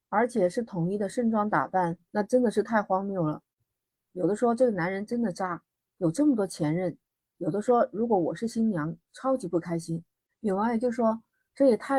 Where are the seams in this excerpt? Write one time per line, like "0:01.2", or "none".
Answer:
0:02.1
0:04.0